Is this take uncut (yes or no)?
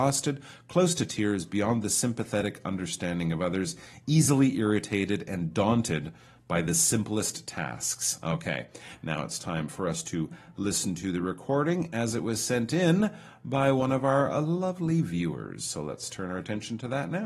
yes